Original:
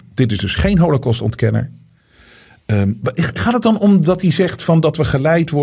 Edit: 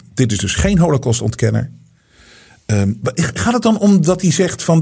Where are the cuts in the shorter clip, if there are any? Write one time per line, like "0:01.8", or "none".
none